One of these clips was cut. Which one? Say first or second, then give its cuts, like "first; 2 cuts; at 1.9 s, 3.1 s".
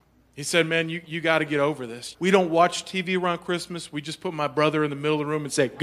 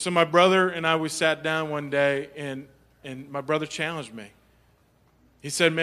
first; 1 cut; at 2.1 s